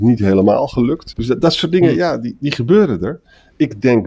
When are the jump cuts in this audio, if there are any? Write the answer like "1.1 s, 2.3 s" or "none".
1.1 s